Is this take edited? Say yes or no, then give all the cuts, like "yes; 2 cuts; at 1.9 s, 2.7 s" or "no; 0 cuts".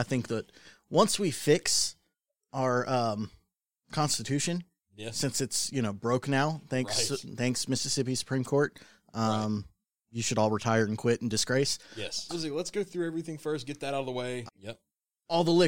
yes; 2 cuts; at 12.3 s, 14.5 s